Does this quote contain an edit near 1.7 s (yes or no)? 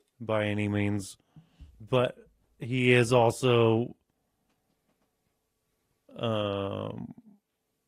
yes